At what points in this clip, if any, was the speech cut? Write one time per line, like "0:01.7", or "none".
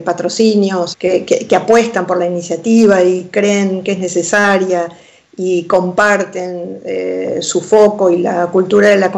0:00.9